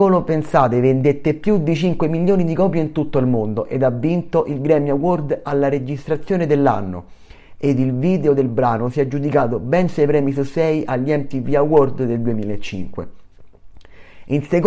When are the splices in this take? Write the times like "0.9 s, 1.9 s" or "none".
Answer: none